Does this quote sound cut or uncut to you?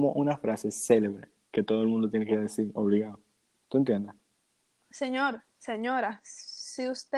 cut